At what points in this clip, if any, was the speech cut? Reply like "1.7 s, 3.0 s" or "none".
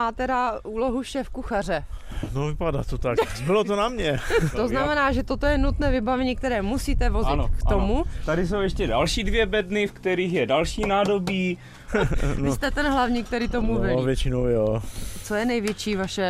4.5 s, 11.9 s